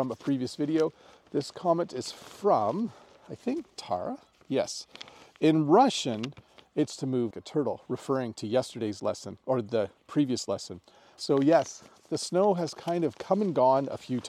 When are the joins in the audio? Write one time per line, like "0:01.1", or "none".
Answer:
0:07.3
0:11.2